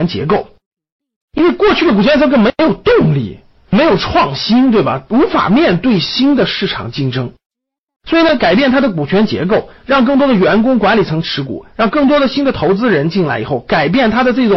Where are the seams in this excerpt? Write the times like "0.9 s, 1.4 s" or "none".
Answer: none